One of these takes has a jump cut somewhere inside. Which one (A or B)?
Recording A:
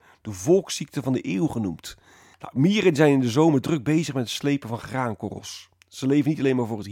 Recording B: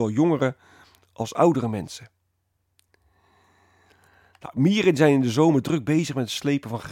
A